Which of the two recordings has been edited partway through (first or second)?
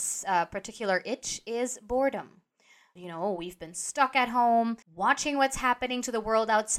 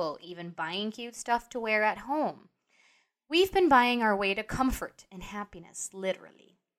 first